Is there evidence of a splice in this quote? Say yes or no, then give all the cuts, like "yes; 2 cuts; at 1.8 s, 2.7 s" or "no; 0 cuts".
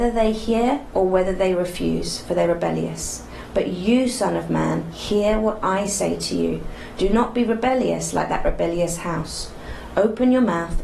no; 0 cuts